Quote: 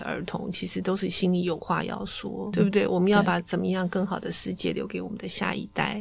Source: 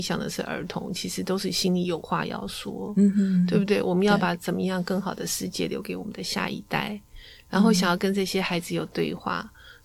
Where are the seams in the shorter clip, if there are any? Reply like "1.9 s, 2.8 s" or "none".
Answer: 2.5 s